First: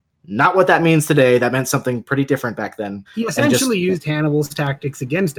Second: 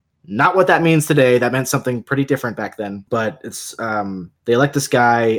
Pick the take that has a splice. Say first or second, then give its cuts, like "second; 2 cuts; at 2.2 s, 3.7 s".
first; 1 cut; at 3.1 s